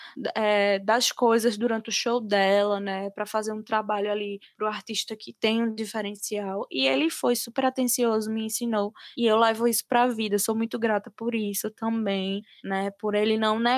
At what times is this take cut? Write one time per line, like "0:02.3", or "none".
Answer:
none